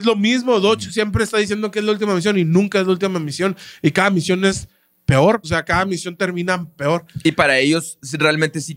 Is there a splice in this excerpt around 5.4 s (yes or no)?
yes